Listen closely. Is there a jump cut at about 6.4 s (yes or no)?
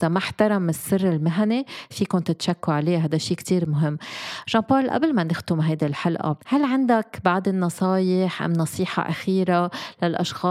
yes